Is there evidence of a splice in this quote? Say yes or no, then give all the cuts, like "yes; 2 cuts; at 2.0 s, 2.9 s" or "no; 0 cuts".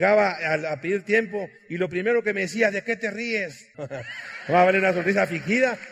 yes; 1 cut; at 3.7 s